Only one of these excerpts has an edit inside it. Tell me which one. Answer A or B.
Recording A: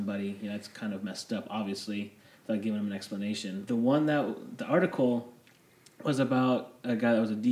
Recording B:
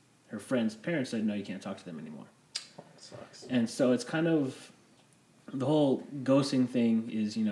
A